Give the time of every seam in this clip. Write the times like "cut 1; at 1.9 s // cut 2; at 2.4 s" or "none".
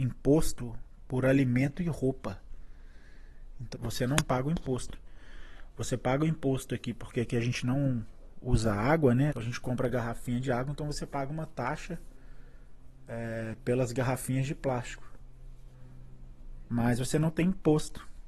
cut 1; at 3.7 s // cut 2; at 9.3 s // cut 3; at 16.7 s

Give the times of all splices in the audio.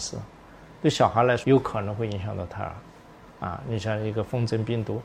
cut 1; at 1.4 s

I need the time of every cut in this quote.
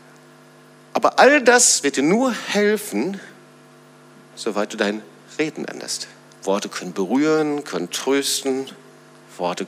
cut 1; at 6.3 s

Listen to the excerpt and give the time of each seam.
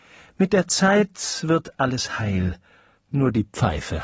none

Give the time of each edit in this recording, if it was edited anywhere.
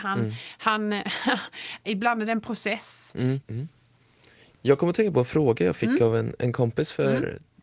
cut 1; at 1.8 s // cut 2; at 3.4 s

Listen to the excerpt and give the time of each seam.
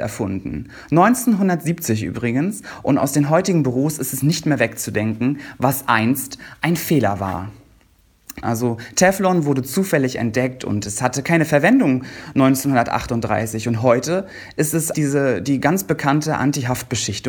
cut 1; at 8.4 s // cut 2; at 14.9 s

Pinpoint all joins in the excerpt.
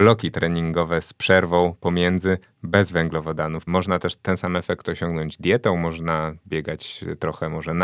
cut 1; at 3.7 s

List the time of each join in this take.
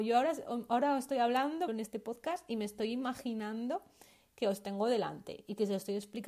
cut 1; at 1.7 s

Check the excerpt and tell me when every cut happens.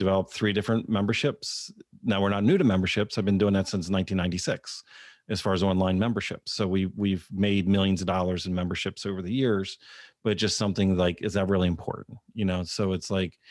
none

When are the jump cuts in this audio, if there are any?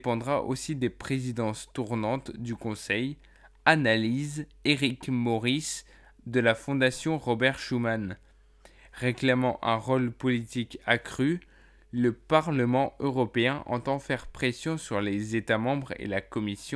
none

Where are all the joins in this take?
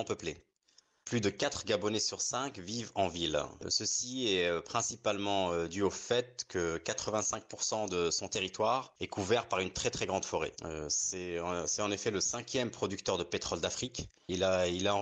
cut 1; at 1.0 s // cut 2; at 3.6 s // cut 3; at 10.5 s

